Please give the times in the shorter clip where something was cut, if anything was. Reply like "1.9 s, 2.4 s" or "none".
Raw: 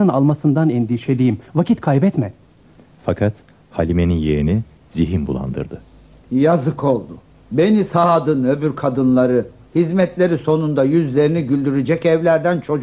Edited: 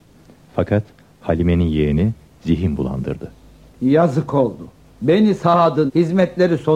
5.9 s

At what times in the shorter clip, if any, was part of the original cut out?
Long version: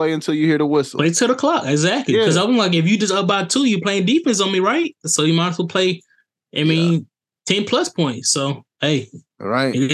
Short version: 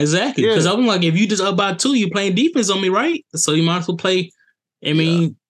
none

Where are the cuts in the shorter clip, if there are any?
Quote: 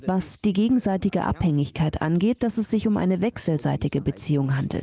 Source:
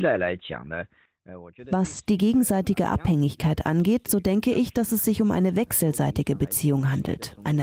2.4 s

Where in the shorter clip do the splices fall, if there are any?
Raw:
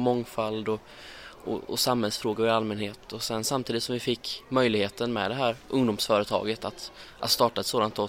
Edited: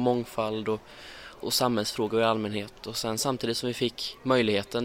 1.4 s

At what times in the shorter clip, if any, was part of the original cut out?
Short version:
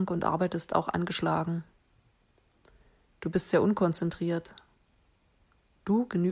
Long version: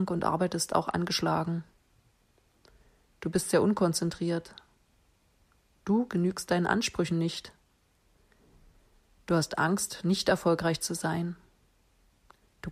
none

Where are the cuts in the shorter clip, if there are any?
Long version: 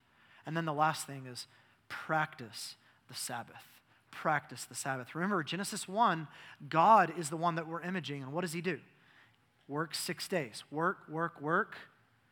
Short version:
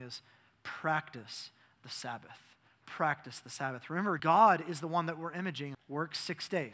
4.2 s, 5.7 s

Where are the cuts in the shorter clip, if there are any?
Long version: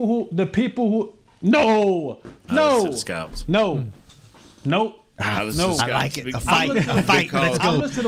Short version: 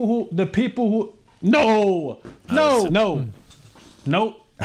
2.9 s

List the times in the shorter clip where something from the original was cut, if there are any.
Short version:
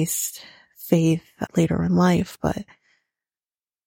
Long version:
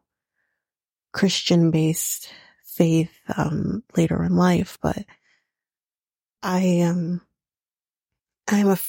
1.5 s

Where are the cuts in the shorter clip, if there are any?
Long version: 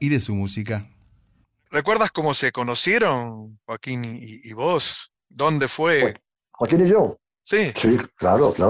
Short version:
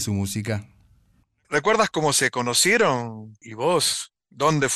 3.4 s

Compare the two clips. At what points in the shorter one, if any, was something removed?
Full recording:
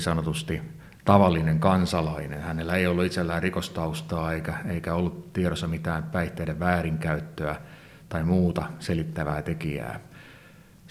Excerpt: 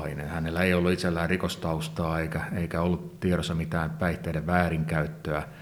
none

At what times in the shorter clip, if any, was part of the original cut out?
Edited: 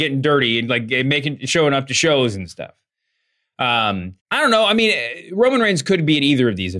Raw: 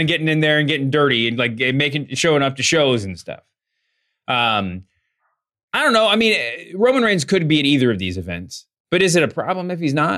4.2 s

